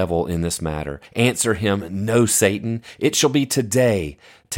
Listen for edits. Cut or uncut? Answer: uncut